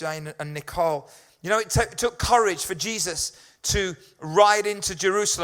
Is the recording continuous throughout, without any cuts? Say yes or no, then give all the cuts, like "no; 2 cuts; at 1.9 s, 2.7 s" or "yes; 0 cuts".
yes; 0 cuts